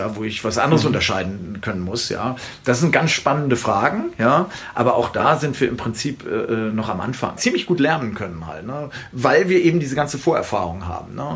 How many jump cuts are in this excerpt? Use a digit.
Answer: 1